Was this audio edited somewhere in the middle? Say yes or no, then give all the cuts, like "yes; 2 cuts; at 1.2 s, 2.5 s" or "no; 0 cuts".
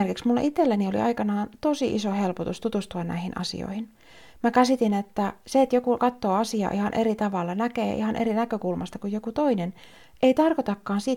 no; 0 cuts